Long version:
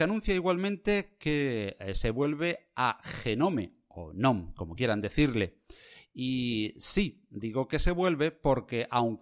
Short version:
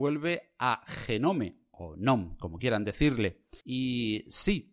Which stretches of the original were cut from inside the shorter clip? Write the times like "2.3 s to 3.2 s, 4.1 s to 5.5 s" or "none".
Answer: 5.8 s to 6.1 s